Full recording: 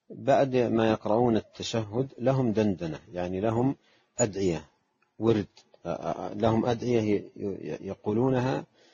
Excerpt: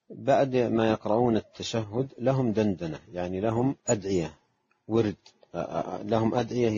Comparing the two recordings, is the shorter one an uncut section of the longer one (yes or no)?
no